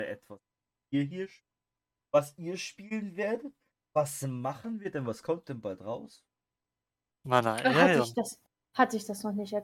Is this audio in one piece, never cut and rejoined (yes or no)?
yes